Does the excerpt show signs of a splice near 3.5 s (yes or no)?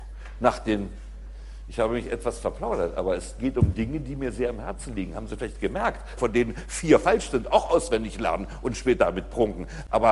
no